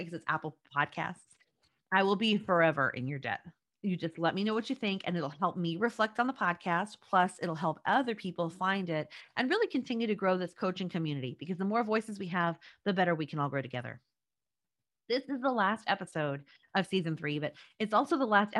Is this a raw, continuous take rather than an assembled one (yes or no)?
yes